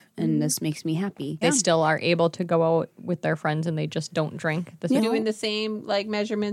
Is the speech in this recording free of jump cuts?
no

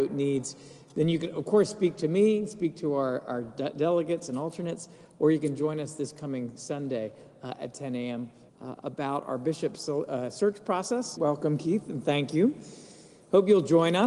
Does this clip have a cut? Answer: yes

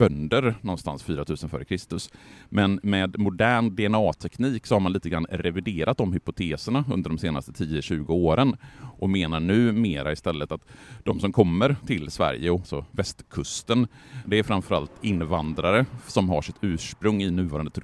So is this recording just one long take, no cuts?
no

